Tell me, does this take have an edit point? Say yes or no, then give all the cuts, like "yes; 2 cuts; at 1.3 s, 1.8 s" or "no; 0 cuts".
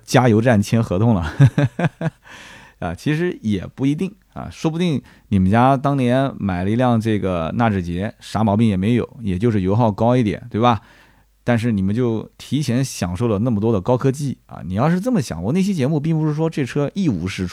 no; 0 cuts